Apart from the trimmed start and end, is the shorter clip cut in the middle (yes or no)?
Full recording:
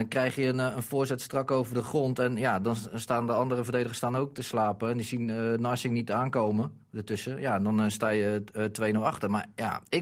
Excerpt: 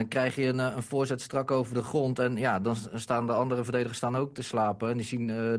no